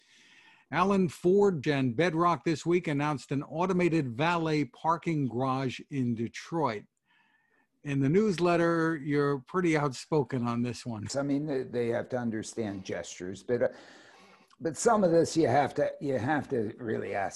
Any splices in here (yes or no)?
yes